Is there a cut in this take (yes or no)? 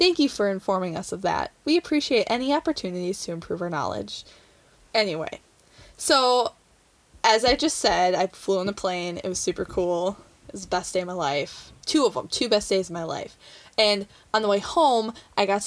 no